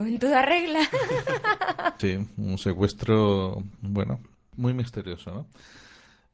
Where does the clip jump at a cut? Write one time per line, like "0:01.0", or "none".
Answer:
0:02.0